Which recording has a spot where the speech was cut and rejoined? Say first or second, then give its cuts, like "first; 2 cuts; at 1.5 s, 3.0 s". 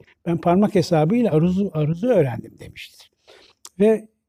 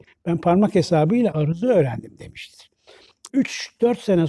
second; 2 cuts; at 1.3 s, 3.3 s